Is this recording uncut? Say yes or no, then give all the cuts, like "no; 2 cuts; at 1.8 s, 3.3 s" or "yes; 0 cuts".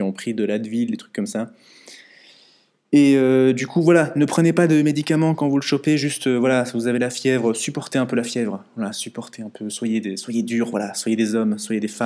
yes; 0 cuts